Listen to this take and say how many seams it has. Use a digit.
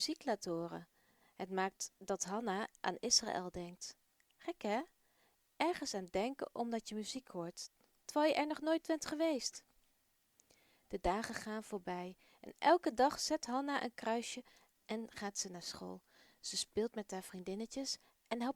0